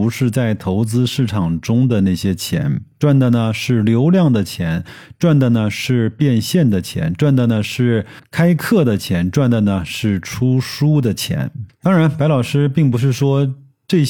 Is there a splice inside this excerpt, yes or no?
no